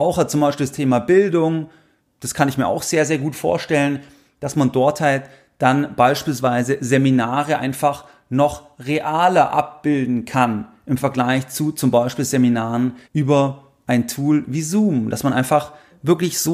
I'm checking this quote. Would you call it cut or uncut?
cut